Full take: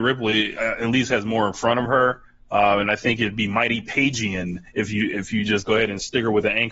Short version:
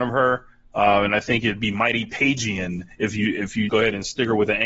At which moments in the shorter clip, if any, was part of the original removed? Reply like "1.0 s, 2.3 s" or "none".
3.7 s

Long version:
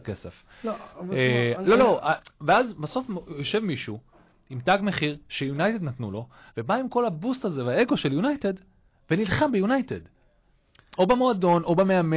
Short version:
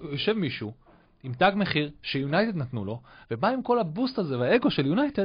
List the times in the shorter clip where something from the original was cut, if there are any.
none

